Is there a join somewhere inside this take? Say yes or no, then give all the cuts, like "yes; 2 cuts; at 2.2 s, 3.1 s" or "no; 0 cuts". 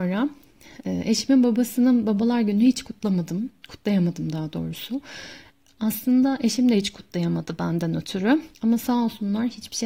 yes; 1 cut; at 8.5 s